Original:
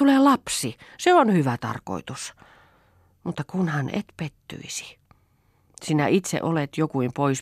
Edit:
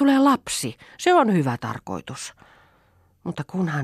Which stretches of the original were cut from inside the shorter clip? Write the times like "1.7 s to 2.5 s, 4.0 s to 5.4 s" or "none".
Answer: none